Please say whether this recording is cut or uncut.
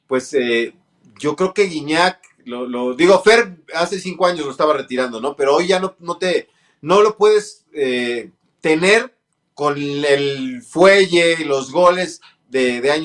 uncut